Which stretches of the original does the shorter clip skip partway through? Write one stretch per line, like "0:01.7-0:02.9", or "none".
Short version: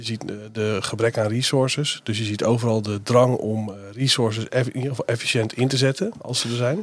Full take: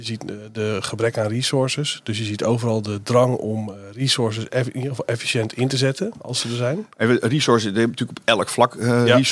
none